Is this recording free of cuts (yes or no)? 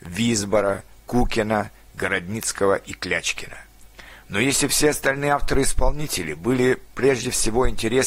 yes